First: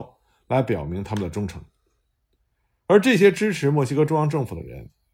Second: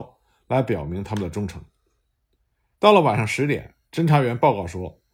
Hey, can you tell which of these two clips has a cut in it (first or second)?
second